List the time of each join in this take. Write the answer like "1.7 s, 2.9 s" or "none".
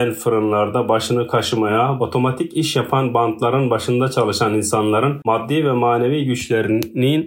2.0 s